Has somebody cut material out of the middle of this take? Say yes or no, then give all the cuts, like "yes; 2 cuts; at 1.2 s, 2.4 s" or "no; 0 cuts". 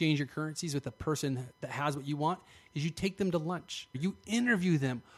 yes; 1 cut; at 3.9 s